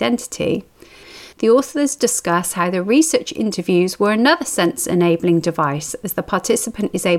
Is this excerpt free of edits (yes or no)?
no